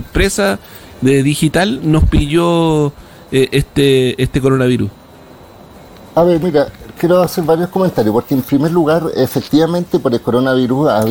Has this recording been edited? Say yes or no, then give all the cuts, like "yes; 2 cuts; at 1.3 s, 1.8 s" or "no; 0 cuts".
no; 0 cuts